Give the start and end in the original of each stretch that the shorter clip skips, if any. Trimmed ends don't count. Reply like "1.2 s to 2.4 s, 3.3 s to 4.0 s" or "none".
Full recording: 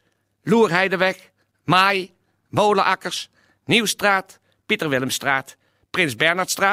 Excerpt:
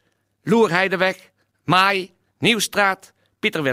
2.3 s to 3.5 s